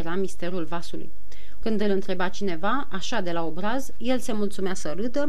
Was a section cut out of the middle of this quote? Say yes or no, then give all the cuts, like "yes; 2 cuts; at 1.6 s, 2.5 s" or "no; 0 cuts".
yes; 1 cut; at 1.6 s